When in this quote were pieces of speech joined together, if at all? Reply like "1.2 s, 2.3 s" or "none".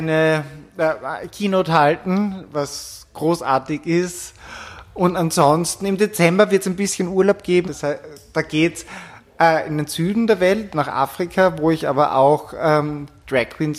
7.6 s